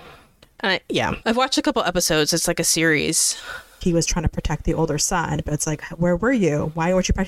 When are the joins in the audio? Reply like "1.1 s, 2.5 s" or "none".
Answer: 1.2 s, 3.8 s